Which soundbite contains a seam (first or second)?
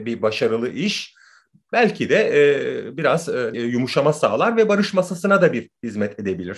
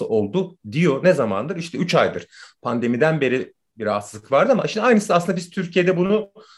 first